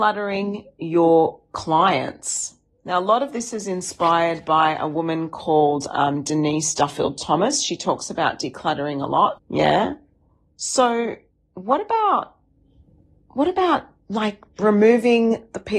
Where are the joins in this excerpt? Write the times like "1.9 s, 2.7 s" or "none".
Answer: 9.4 s